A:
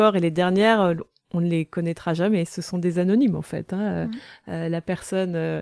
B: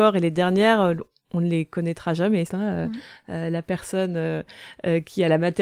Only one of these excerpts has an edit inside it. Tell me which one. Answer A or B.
B